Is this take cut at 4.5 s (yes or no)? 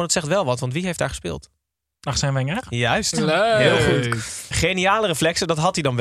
yes